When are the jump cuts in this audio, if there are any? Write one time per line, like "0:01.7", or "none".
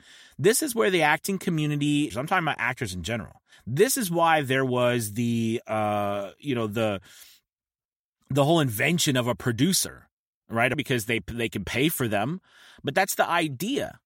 0:02.1
0:03.5
0:10.7